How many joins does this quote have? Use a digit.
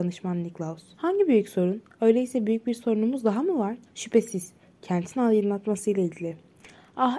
2